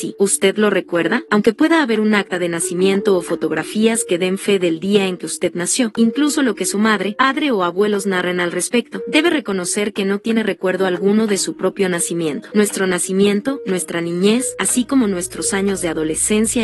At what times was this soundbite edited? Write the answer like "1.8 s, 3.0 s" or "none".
12.5 s